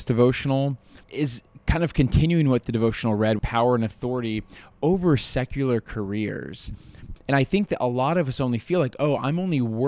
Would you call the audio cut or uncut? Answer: cut